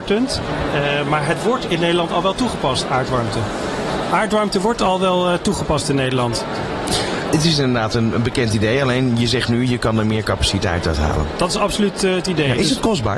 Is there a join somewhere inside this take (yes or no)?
no